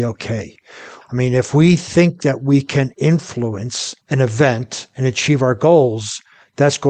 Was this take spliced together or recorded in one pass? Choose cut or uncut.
cut